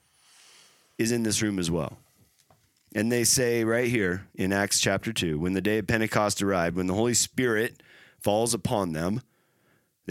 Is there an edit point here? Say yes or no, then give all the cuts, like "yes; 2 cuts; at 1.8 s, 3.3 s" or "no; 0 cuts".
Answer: no; 0 cuts